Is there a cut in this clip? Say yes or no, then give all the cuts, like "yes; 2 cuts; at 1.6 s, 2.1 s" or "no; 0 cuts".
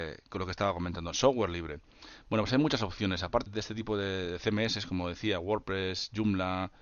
yes; 1 cut; at 3.5 s